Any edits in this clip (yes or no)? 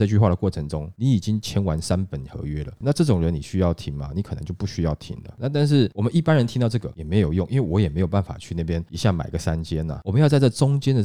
no